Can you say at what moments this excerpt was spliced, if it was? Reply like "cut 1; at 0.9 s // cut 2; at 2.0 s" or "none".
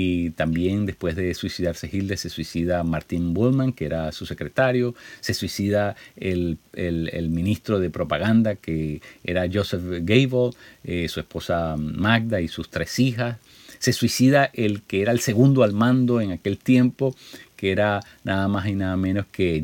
none